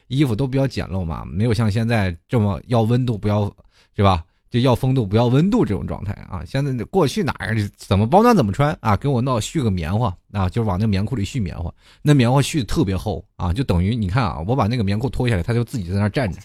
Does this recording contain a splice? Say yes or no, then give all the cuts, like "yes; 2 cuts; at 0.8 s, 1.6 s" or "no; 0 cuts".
no; 0 cuts